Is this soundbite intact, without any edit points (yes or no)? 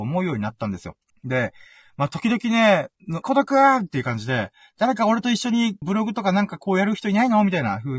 no